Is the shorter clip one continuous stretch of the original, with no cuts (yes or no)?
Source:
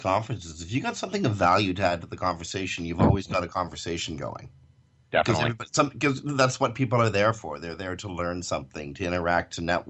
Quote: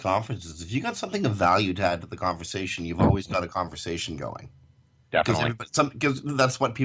yes